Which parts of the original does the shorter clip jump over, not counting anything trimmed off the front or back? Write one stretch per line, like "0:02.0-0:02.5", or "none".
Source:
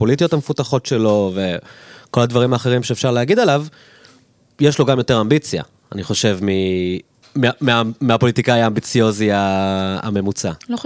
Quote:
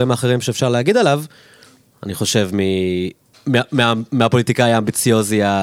0:04.3-0:05.8